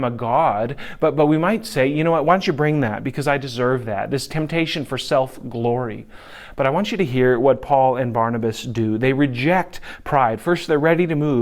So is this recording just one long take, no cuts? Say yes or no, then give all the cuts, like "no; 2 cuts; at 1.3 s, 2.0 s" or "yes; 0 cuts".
yes; 0 cuts